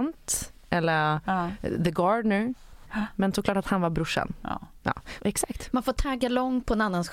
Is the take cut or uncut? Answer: cut